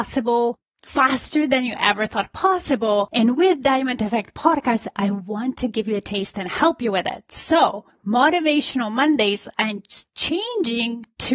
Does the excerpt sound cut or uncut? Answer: uncut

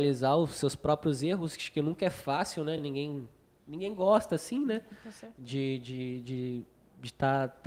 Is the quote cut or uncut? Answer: uncut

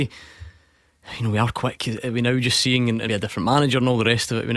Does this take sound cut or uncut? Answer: cut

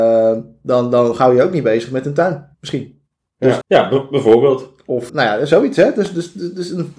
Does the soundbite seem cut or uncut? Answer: cut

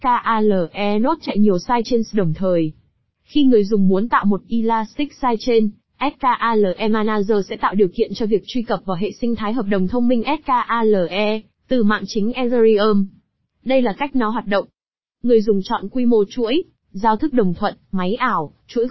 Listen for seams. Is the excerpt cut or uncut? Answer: uncut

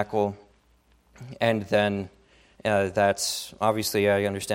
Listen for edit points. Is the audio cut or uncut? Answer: cut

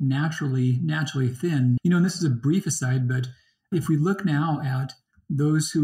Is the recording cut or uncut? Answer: cut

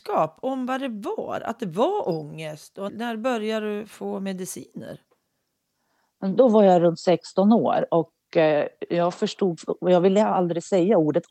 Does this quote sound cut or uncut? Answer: cut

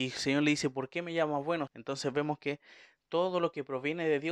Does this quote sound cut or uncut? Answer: cut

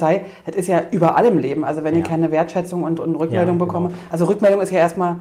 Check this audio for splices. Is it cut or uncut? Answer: uncut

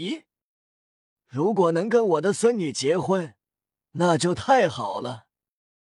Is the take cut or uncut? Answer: cut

